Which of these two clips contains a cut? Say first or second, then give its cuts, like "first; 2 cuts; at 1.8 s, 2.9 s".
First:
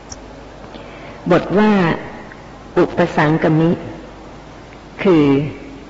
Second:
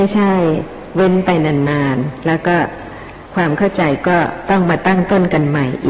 second; 1 cut; at 3.3 s